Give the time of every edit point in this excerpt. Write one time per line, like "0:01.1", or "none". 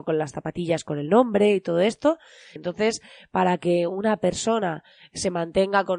0:02.6